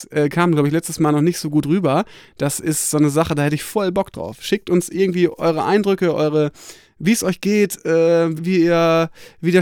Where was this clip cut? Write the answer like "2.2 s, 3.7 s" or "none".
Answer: 8.4 s